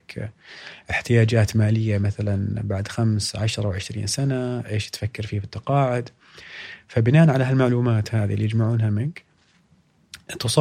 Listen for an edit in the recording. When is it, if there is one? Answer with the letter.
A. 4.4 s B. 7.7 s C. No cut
C